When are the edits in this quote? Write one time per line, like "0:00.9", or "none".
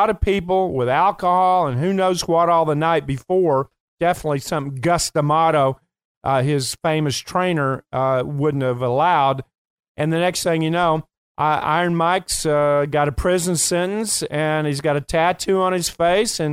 none